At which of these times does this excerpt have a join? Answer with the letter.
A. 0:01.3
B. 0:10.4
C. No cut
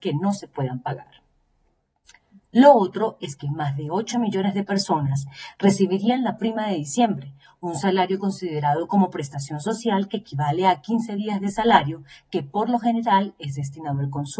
C